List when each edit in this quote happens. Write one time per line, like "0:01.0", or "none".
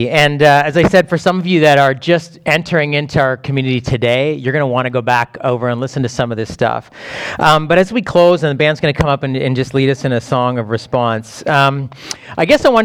none